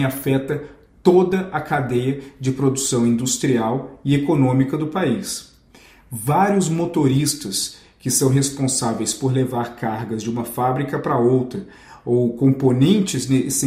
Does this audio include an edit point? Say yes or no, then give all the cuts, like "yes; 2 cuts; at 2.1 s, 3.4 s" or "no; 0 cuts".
no; 0 cuts